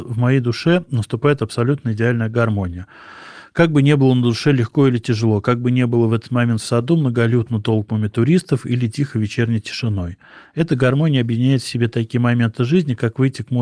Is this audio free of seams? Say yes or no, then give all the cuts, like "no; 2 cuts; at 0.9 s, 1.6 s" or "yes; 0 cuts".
yes; 0 cuts